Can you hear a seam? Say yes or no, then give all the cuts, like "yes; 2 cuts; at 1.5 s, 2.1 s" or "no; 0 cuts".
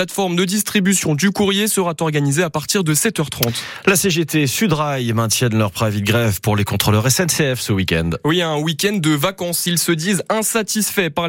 no; 0 cuts